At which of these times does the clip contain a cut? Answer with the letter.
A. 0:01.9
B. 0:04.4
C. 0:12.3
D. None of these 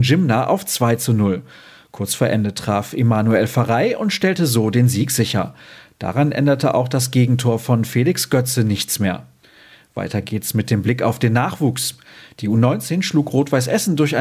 D